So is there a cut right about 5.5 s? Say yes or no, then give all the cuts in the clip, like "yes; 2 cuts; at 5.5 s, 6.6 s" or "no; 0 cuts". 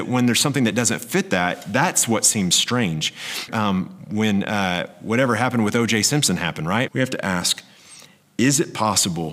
no; 2 cuts; at 3.5 s, 6.9 s